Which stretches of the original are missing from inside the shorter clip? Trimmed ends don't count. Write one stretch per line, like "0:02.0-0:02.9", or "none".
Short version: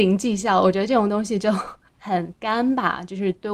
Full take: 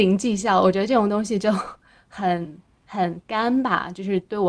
0:01.9-0:02.8